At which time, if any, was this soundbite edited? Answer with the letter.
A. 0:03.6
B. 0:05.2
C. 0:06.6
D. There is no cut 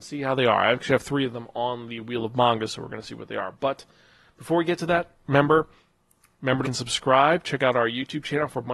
C